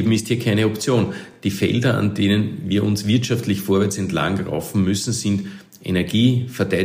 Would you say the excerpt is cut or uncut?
uncut